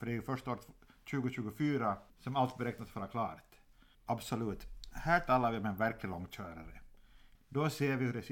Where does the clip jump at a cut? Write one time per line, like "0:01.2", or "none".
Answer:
0:02.1
0:03.9
0:07.4